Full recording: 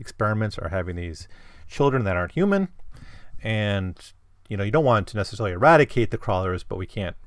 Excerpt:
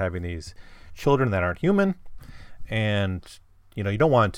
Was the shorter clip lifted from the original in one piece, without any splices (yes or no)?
yes